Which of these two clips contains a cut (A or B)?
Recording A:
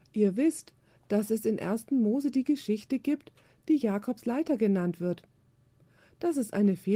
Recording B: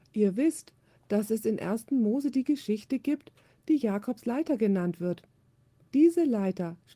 B